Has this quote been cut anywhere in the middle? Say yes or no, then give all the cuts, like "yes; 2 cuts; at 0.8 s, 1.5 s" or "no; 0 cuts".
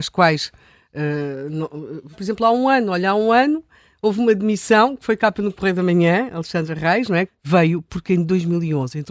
yes; 2 cuts; at 2.1 s, 7.3 s